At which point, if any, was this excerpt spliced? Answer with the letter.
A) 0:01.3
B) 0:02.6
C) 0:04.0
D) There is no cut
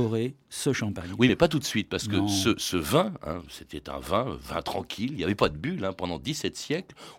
D